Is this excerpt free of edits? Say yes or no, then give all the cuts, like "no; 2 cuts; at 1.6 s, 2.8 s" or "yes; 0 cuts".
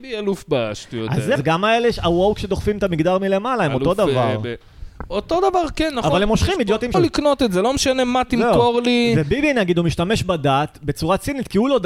no; 2 cuts; at 1.4 s, 6.9 s